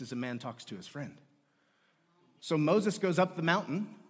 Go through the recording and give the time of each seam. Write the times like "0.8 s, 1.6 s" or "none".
2.4 s